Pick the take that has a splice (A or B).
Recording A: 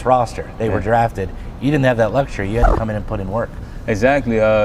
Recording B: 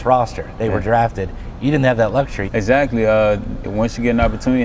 B